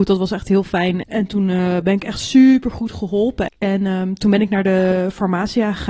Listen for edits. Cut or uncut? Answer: cut